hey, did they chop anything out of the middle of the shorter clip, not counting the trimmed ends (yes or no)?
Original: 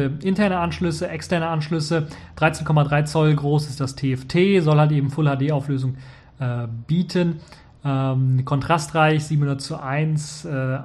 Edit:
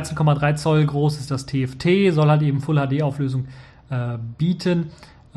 no